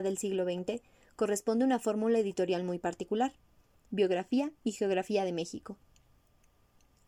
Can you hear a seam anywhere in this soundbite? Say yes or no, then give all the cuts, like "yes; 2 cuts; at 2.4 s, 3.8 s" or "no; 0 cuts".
yes; 1 cut; at 3.9 s